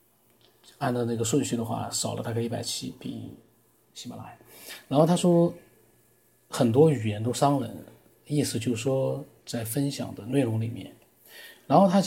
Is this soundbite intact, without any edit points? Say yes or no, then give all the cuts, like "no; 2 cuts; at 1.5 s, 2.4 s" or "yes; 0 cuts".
yes; 0 cuts